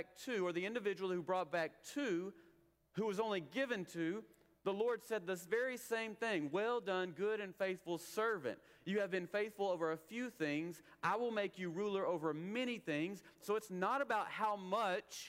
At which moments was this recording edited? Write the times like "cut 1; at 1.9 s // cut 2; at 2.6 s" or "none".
cut 1; at 13.4 s

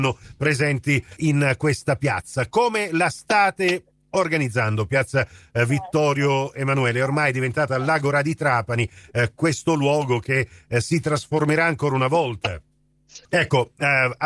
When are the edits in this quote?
cut 1; at 1.2 s // cut 2; at 13.2 s

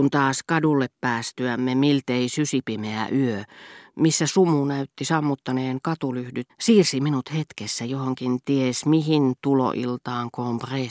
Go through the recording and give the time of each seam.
cut 1; at 6.5 s

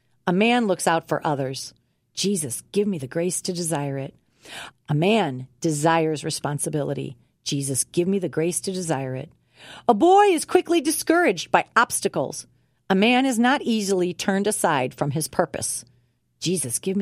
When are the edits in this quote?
cut 1; at 4.7 s

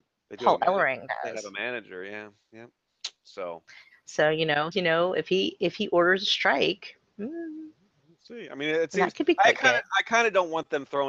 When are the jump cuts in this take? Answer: cut 1; at 4.7 s

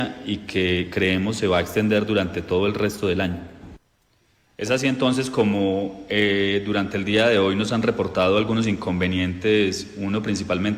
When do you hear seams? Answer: none

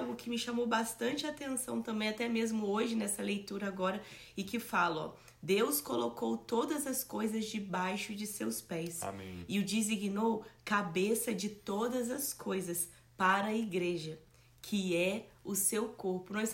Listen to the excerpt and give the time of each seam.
none

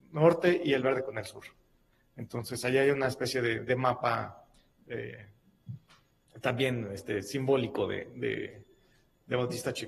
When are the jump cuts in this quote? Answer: none

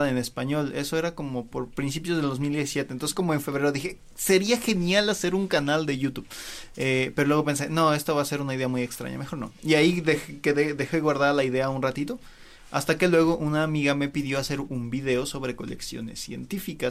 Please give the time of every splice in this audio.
none

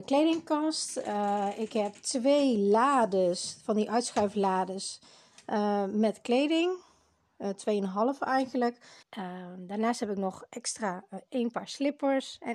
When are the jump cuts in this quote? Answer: cut 1; at 9.0 s // cut 2; at 11.3 s

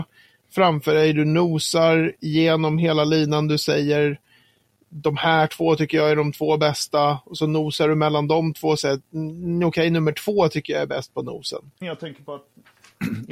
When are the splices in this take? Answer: cut 1; at 11.8 s

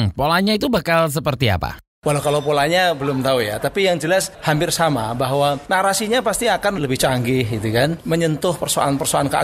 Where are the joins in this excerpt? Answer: cut 1; at 6.8 s

